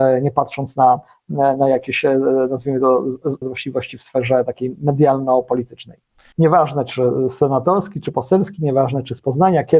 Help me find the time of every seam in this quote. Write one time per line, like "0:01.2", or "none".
0:03.4
0:06.3